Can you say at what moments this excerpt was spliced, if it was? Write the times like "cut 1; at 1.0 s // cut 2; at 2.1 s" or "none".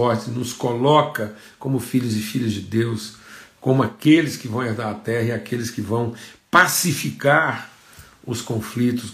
none

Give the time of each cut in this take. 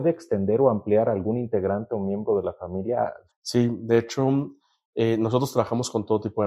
cut 1; at 3.3 s

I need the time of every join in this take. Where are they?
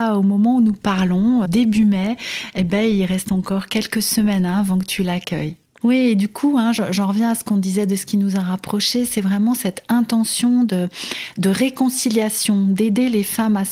cut 1; at 1.5 s // cut 2; at 5.8 s

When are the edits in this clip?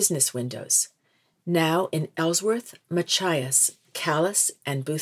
none

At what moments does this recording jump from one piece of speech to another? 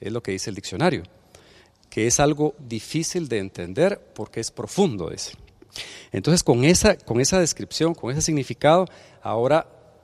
cut 1; at 2.6 s

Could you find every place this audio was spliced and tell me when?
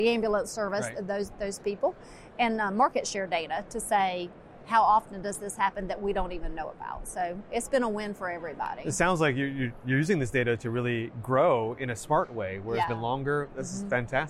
cut 1; at 12.9 s

